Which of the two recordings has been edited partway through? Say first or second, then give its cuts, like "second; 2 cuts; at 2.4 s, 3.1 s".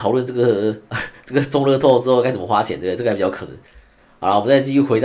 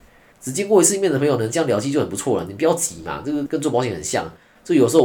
second; 1 cut; at 3.5 s